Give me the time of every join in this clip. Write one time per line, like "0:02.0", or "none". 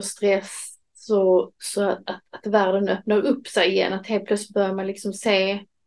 none